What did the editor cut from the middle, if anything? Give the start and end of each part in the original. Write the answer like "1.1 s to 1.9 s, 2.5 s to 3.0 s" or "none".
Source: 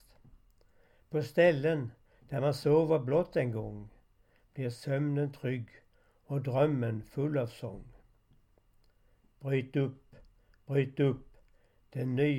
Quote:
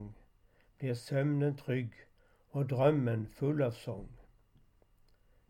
none